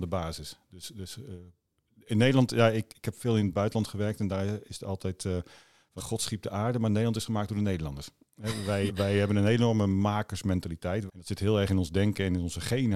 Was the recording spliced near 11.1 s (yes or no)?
yes